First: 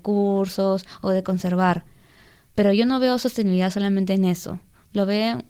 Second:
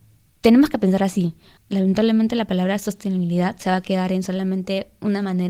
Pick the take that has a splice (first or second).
second